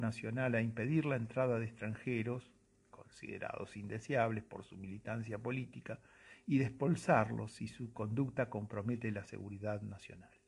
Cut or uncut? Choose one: uncut